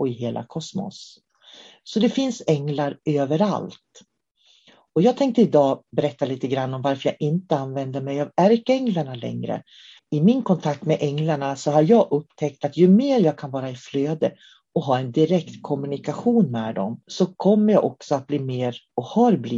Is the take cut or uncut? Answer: cut